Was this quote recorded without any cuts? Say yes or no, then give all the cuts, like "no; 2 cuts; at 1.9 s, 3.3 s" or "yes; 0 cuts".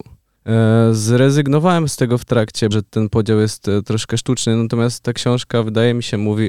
no; 1 cut; at 2.7 s